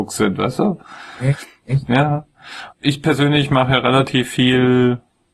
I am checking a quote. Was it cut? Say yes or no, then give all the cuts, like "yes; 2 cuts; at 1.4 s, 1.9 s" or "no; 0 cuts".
yes; 1 cut; at 2.7 s